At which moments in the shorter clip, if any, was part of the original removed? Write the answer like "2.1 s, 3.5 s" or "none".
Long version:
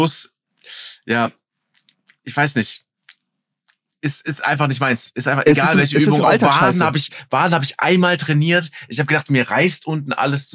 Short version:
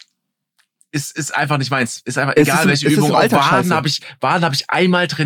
none